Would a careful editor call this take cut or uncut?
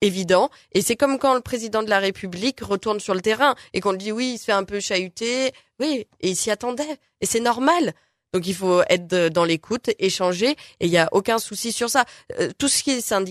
uncut